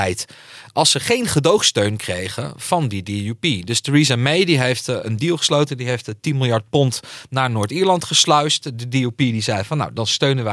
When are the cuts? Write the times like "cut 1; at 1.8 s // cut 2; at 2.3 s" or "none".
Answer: none